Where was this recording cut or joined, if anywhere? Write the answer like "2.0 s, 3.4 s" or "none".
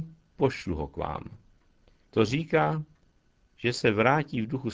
3.4 s